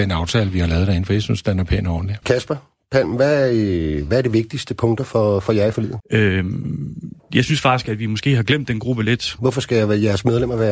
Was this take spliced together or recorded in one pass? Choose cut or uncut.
cut